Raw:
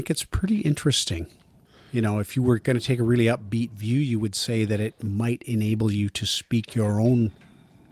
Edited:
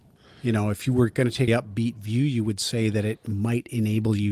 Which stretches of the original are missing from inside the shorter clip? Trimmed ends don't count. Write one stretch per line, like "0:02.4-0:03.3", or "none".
0:03.0-0:03.2